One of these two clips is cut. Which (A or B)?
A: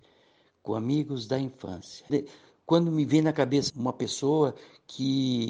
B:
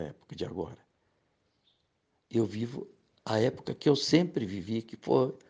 A